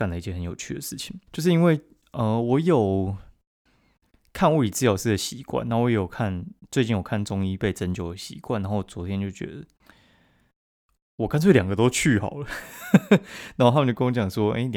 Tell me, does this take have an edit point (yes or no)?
yes